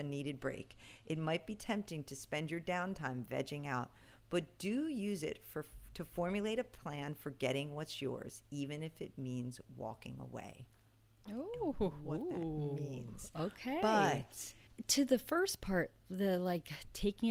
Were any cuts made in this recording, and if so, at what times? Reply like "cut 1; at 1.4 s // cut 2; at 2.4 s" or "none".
none